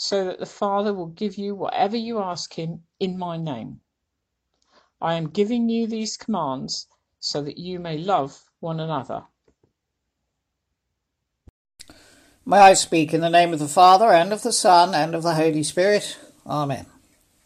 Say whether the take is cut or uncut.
uncut